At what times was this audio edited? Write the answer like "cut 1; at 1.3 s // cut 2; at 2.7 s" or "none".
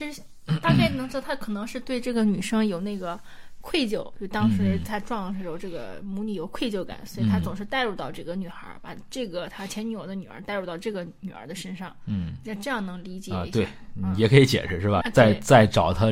cut 1; at 15.0 s